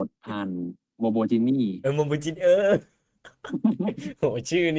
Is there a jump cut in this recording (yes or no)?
no